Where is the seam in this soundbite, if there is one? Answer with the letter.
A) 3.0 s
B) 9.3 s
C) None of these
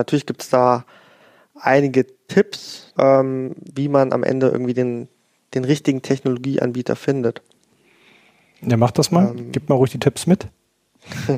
A